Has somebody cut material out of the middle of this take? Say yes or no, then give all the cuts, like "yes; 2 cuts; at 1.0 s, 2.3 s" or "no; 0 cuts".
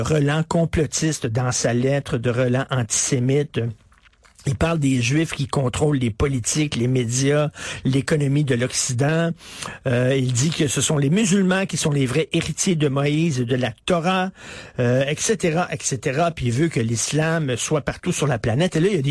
no; 0 cuts